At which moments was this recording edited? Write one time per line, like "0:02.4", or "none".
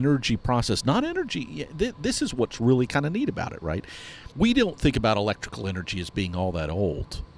0:04.3

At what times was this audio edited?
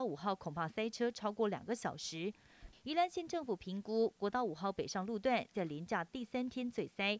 0:02.7

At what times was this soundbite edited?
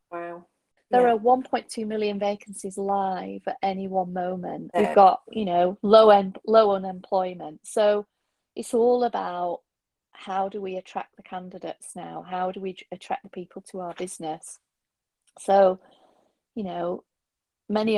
0:04.7

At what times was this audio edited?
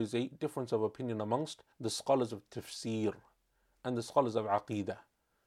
0:01.7

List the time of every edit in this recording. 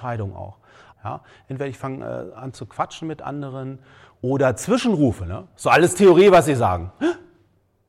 0:00.9

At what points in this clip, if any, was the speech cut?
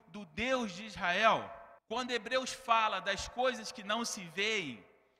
0:01.8

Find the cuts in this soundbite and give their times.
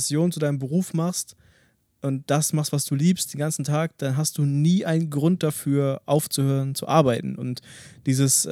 none

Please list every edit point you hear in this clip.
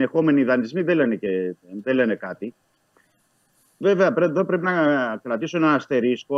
none

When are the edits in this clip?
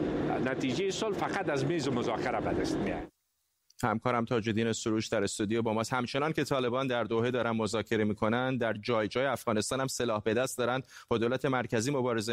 none

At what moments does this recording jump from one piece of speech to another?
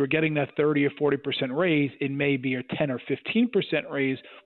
none

